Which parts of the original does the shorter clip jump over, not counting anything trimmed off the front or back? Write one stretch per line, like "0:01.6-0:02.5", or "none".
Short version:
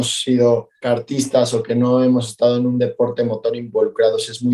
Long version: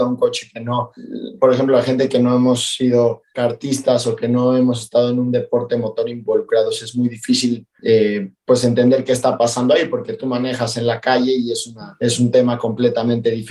none